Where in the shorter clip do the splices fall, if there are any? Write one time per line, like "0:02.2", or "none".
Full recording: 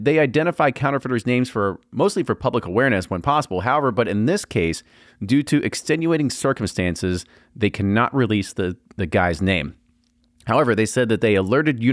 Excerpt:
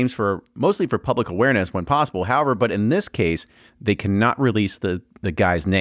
0:03.7